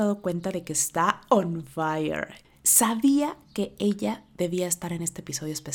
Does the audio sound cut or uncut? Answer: cut